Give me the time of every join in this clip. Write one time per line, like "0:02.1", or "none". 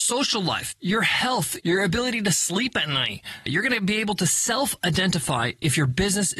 0:01.6
0:03.5